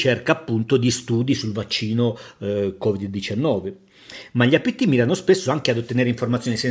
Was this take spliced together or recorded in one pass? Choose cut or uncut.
uncut